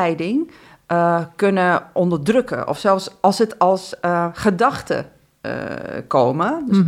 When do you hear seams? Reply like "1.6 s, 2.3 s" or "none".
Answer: none

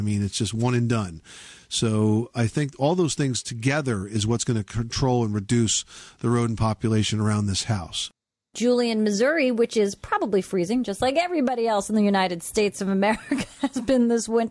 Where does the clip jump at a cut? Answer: none

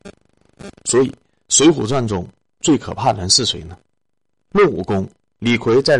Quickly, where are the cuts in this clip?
4.5 s

